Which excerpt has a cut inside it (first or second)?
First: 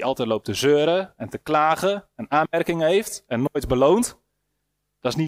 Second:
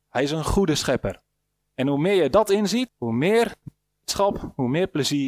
second